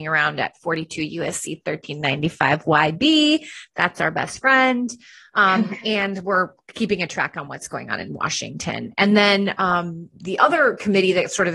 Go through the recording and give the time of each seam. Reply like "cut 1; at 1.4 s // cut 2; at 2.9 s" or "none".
cut 1; at 10.1 s